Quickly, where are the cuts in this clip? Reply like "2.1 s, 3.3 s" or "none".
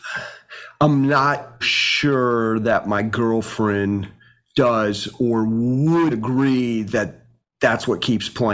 1.6 s, 6.1 s